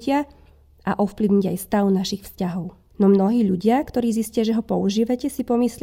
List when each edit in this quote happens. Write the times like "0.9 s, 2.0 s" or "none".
2.9 s